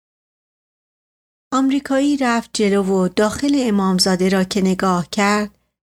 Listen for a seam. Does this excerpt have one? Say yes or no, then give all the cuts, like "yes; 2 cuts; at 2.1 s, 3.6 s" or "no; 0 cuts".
no; 0 cuts